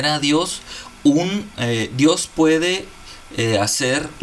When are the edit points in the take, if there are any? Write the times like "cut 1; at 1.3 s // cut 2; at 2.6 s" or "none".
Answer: none